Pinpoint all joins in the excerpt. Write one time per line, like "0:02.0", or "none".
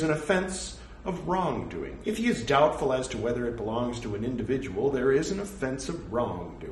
0:02.0

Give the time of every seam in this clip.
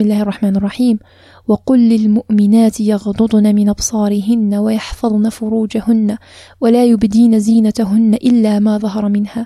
none

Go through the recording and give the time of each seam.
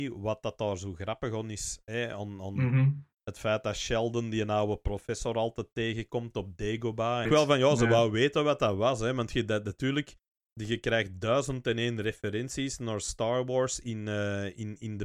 0:07.3

